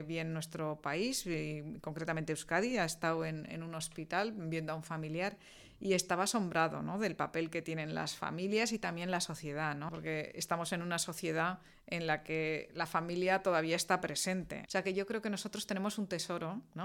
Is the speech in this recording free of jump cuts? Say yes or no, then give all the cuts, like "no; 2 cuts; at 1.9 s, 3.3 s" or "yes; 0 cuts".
no; 2 cuts; at 9.9 s, 14.7 s